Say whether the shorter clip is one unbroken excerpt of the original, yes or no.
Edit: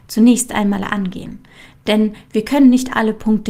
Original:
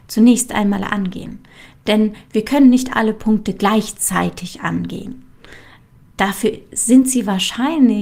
yes